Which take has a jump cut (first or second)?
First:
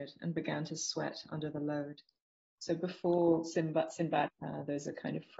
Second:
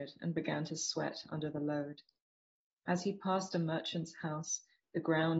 first